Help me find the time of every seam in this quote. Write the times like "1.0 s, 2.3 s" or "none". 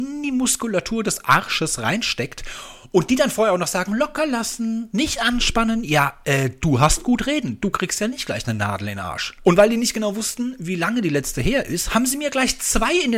9.4 s